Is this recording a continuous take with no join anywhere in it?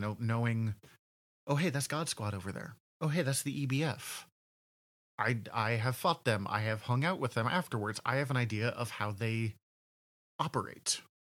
yes; 0 cuts

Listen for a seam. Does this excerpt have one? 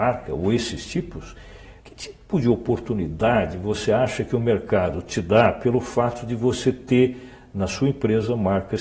yes; 1 cut; at 1.8 s

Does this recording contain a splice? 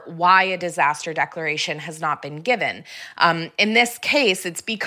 no; 0 cuts

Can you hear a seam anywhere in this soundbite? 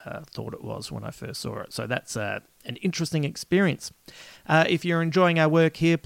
no; 0 cuts

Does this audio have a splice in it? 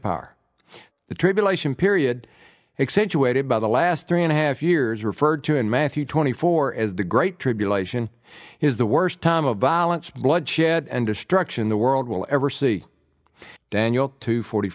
yes; 2 cuts; at 0.9 s, 13.6 s

